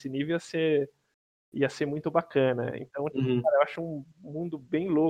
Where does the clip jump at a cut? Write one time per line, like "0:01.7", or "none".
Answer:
none